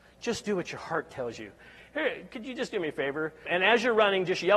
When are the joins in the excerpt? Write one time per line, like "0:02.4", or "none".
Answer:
0:03.4